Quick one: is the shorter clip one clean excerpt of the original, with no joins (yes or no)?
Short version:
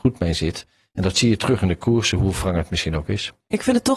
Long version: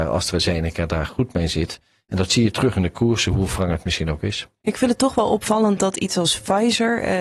yes